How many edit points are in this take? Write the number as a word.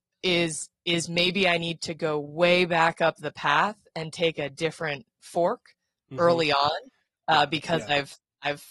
zero